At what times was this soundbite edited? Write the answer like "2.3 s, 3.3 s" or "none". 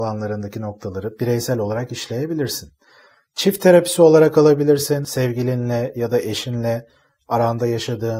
none